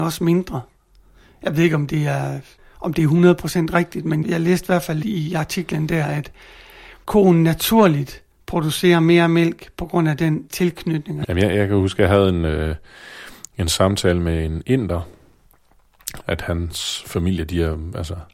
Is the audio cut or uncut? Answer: cut